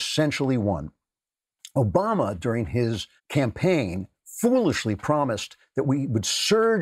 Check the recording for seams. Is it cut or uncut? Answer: cut